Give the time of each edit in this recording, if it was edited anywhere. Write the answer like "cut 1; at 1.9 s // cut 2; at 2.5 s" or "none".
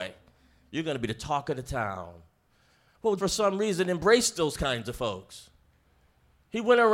cut 1; at 3.2 s